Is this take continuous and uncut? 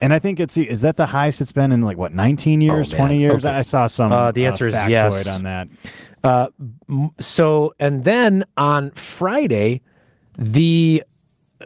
yes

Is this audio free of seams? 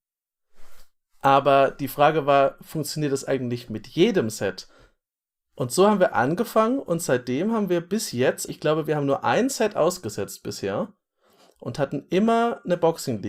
no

